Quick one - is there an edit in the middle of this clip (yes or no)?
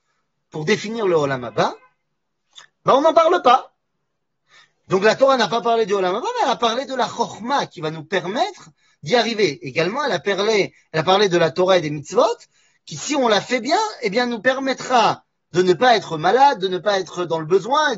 no